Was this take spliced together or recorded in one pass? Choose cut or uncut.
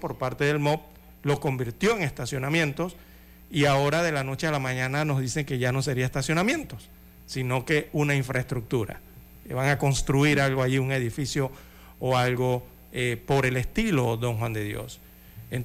uncut